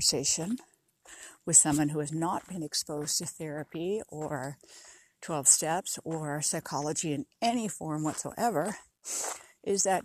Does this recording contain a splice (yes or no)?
no